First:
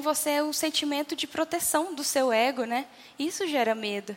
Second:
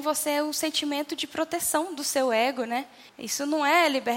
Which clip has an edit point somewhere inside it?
second; 1 cut; at 3.1 s

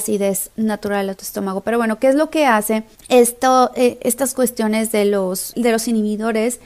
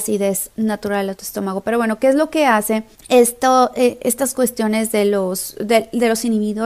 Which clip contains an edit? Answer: first; 1 cut; at 5.5 s

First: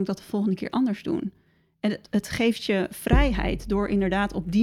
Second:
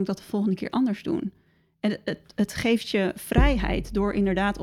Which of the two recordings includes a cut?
first; 1 cut; at 2.0 s

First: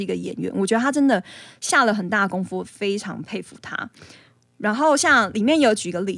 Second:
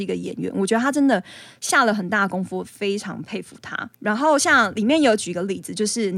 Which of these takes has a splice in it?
second; 1 cut; at 3.9 s

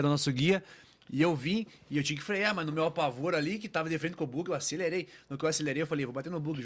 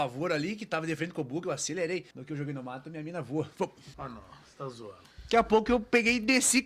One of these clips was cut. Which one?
second; 2 cuts; at 2.1 s, 3.9 s

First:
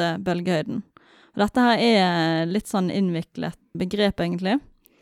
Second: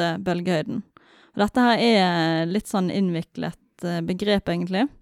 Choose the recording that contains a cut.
first; 1 cut; at 3.7 s

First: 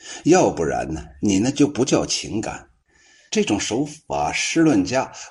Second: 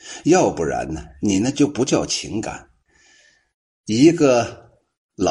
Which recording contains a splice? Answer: first; 1 cut; at 3.3 s

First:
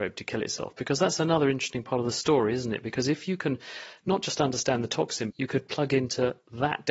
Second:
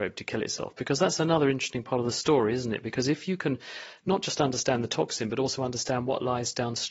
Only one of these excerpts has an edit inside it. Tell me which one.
first; 1 cut; at 5.3 s

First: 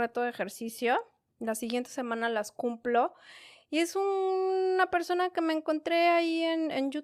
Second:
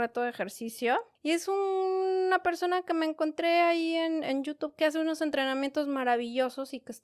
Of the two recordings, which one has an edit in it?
second; 1 cut; at 1.2 s

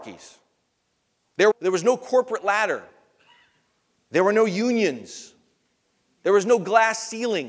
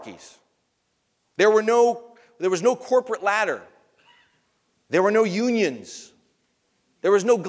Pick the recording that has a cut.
first; 1 cut; at 1.5 s

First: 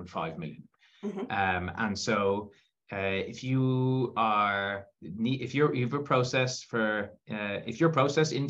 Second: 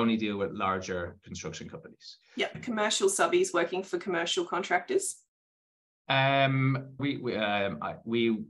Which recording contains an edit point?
second; 2 cuts; at 2.5 s, 7.0 s

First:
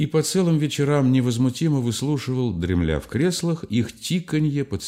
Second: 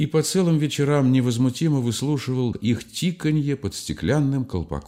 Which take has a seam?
second; 1 cut; at 2.5 s

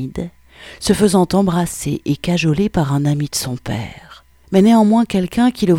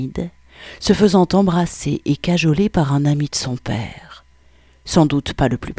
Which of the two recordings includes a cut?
first; 1 cut; at 4.4 s

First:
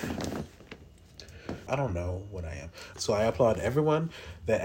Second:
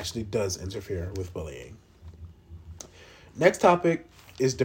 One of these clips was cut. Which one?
first; 2 cuts; at 1.7 s, 2.9 s

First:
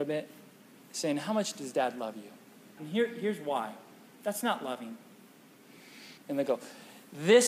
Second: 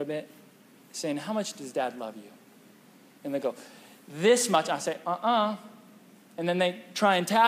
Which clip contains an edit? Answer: first; 2 cuts; at 2.8 s, 6.2 s

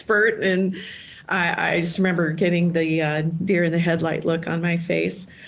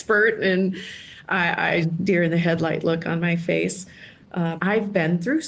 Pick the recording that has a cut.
second; 2 cuts; at 1.8 s, 4.6 s

